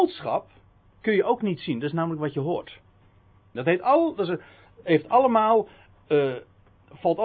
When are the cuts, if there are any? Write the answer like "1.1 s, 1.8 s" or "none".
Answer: 3.6 s